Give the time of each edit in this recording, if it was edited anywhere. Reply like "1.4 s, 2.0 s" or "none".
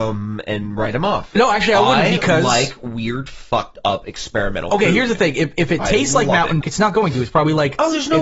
6.6 s